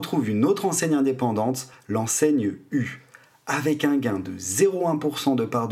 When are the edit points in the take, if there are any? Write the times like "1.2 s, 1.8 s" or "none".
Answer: none